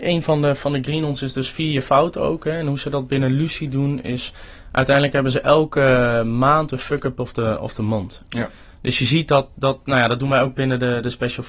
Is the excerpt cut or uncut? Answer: cut